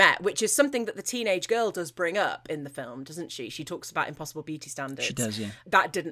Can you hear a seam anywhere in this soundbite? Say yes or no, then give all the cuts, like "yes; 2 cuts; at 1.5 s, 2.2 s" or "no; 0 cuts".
no; 0 cuts